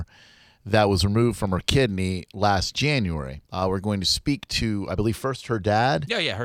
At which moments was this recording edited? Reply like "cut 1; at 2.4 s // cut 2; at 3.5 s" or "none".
cut 1; at 3.4 s

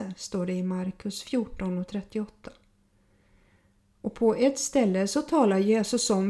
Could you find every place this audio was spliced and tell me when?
none

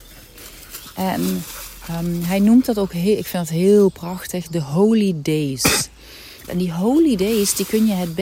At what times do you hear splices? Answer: cut 1; at 6.5 s

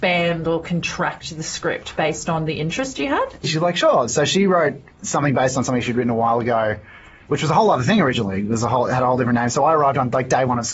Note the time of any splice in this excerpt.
cut 1; at 3.4 s

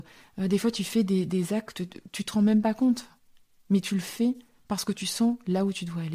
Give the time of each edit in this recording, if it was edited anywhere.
none

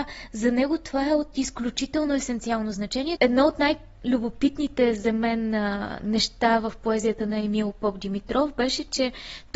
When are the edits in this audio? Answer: cut 1; at 3.2 s

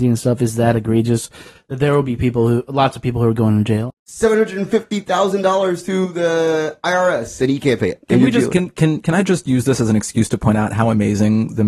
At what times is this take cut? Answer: cut 1; at 3.9 s

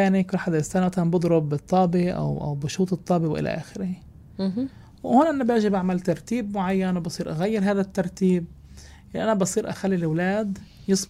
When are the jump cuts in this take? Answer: none

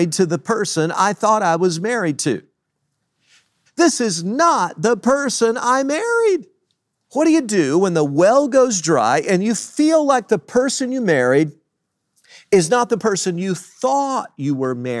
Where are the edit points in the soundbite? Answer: cut 1; at 3.7 s // cut 2; at 7.0 s

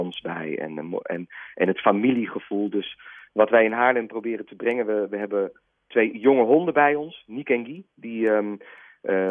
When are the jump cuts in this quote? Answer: none

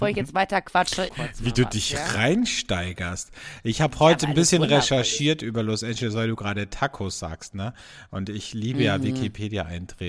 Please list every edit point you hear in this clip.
cut 1; at 1.1 s

